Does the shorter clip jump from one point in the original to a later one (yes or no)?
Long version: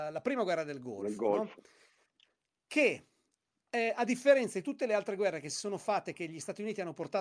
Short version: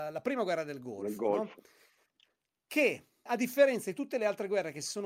yes